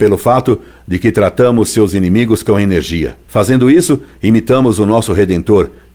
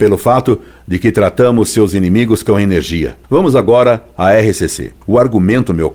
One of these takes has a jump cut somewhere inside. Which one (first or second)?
second